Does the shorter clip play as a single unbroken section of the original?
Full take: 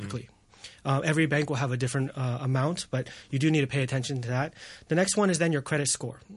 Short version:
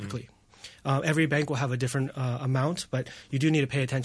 yes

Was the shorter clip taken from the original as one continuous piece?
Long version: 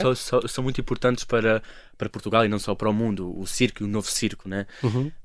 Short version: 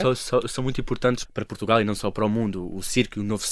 no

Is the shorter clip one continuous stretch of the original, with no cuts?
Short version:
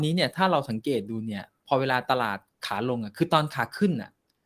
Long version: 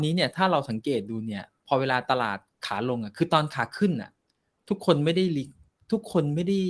yes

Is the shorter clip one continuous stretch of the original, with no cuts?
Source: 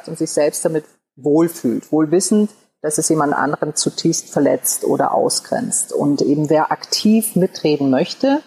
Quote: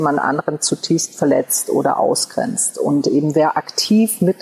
yes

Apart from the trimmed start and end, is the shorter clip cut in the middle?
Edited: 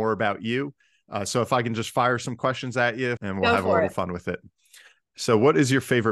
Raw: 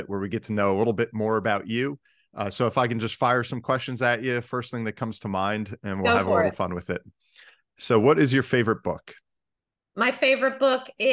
yes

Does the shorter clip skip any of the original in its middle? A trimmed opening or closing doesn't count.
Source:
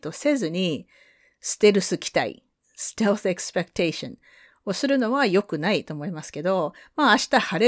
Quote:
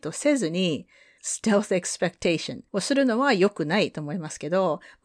yes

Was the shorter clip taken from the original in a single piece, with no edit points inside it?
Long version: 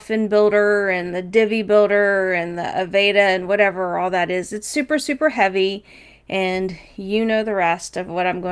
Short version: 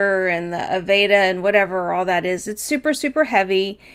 yes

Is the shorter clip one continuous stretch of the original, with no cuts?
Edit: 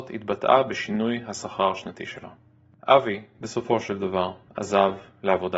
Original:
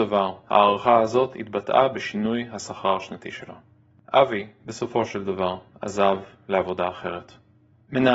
yes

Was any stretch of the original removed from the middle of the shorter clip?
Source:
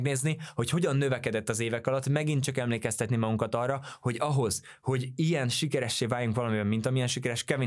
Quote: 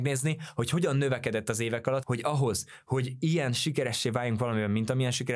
yes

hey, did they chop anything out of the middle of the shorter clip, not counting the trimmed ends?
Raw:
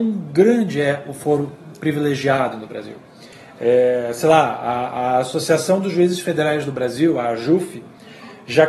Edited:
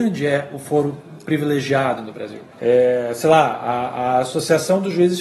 yes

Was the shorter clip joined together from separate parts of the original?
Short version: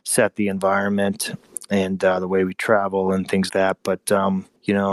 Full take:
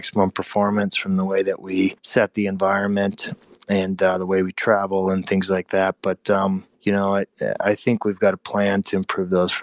yes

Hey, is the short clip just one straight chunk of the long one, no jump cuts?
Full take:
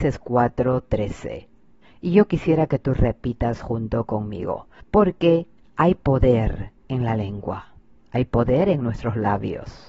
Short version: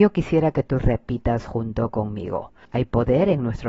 no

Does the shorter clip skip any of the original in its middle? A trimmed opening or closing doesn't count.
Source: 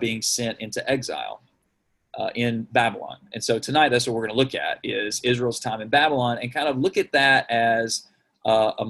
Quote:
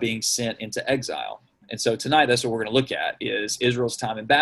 yes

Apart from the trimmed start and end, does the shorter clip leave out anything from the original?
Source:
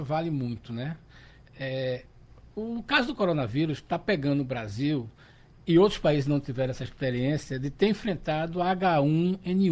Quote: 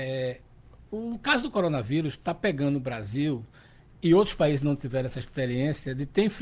no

